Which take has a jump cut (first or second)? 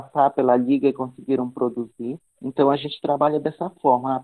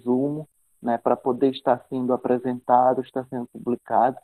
first